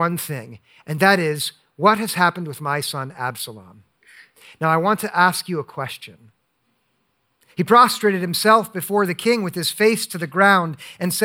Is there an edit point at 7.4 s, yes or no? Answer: yes